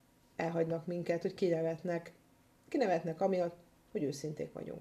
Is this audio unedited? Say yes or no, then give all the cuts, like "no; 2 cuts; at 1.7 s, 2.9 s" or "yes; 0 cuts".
yes; 0 cuts